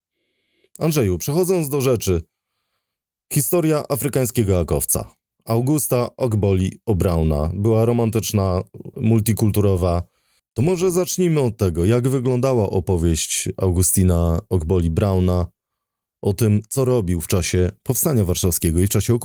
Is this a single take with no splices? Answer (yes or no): no